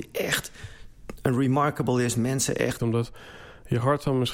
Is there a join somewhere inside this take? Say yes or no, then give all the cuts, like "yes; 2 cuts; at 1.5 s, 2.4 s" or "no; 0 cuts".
yes; 1 cut; at 2.8 s